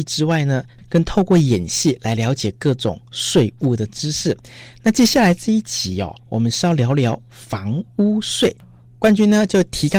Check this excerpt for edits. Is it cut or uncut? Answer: uncut